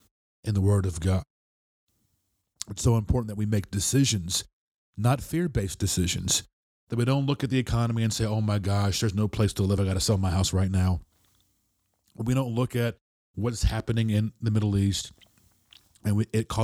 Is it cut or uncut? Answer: uncut